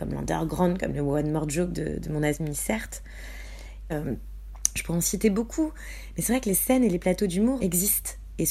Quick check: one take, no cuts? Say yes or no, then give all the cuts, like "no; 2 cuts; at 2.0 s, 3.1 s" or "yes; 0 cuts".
no; 2 cuts; at 3.9 s, 7.6 s